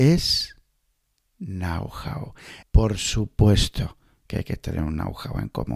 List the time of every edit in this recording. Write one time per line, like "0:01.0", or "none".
0:02.6